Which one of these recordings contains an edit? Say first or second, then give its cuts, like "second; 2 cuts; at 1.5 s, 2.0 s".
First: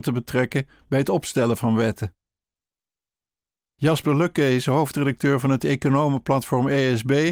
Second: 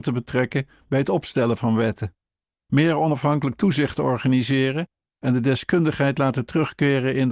second; 1 cut; at 2.5 s